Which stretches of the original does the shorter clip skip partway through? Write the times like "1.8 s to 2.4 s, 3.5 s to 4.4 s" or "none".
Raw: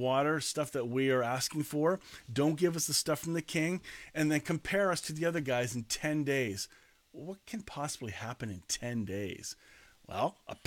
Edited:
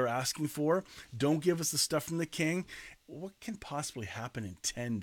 4.1 s to 7.0 s

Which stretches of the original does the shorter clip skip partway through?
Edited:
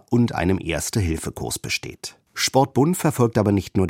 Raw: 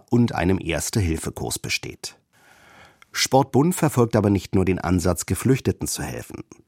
2.3 s to 3.0 s

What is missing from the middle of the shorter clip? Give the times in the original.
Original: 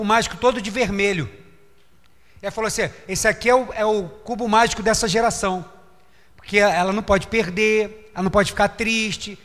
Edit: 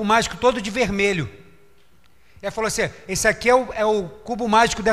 none

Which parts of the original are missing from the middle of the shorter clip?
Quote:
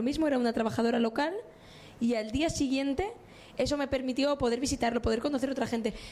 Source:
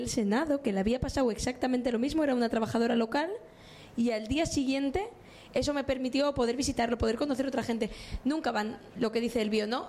none

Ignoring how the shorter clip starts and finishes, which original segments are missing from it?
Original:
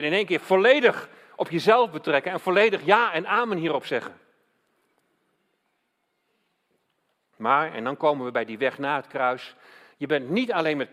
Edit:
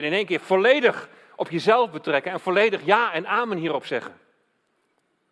none

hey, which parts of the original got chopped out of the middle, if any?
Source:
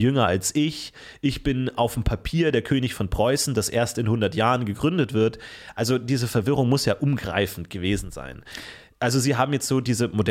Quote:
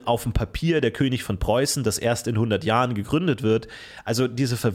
none

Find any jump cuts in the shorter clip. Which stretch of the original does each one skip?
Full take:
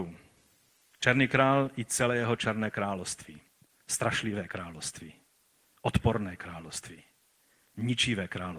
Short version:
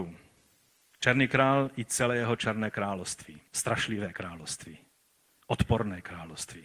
3.5 s to 3.8 s

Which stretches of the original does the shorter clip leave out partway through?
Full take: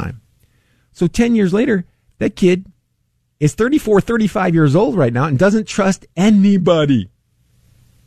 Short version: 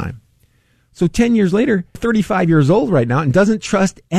1.9 s to 4.0 s

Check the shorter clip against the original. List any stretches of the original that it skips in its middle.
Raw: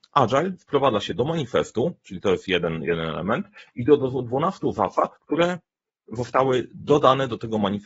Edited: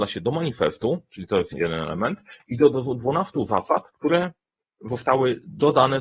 2.5 s to 2.8 s

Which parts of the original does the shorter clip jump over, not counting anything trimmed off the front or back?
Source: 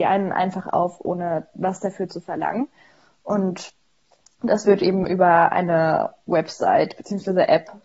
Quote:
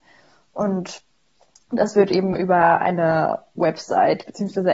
none

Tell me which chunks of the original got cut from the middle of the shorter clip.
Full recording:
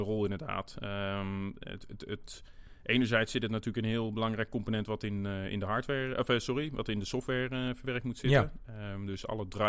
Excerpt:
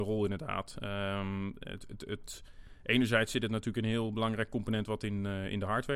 none

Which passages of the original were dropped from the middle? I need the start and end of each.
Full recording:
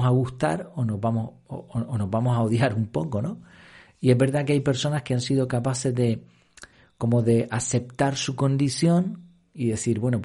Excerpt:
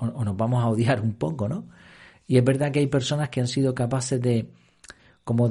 none

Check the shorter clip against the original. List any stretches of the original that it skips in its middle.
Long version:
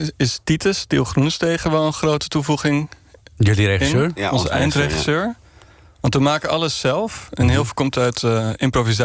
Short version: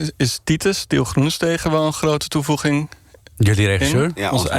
none

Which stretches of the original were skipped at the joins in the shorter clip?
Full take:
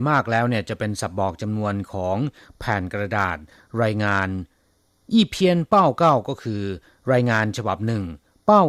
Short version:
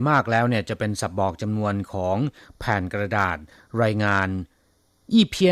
none

